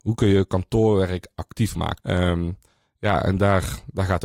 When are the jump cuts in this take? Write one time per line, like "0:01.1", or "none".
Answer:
0:02.0